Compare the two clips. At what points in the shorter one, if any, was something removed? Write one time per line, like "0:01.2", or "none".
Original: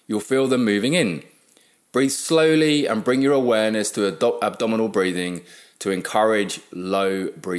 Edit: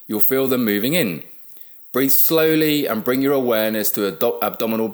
none